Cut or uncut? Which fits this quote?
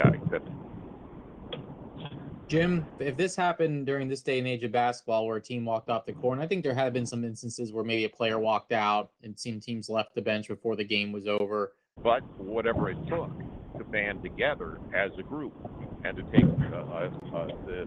cut